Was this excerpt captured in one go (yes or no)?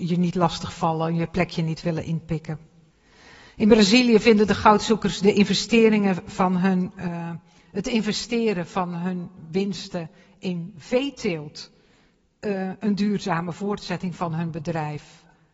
yes